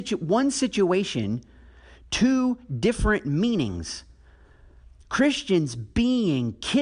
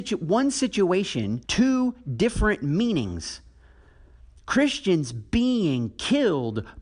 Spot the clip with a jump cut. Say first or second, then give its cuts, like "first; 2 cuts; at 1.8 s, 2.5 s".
second; 1 cut; at 1.4 s